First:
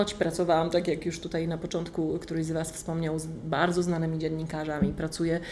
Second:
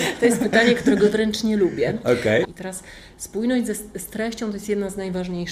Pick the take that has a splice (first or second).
second